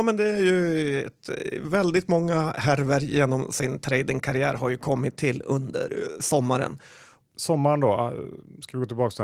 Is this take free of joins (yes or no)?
no